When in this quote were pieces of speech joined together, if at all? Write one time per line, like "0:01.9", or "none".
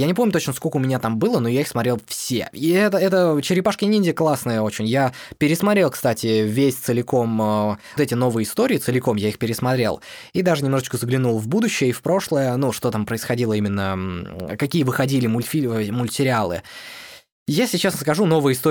0:08.0